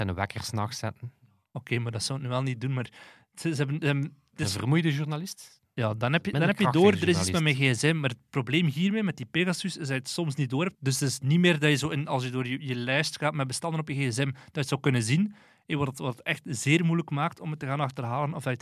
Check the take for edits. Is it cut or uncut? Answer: cut